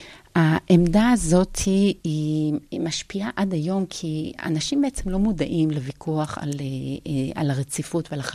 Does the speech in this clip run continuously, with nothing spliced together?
yes; 0 cuts

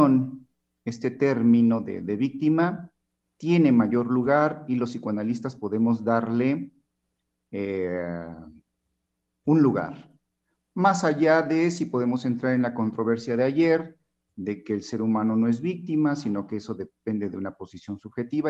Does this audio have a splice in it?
no; 0 cuts

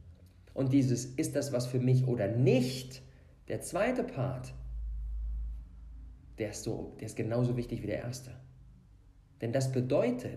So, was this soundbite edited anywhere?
no; 0 cuts

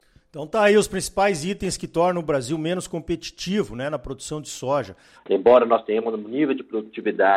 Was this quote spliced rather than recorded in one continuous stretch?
yes; 1 cut; at 5.1 s

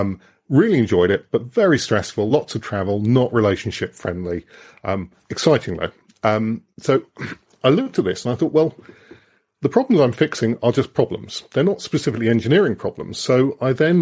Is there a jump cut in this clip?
no; 0 cuts

